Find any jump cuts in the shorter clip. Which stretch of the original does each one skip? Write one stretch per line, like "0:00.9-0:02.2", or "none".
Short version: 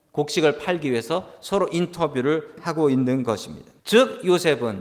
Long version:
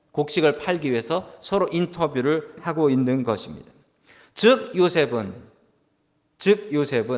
0:03.8-0:04.3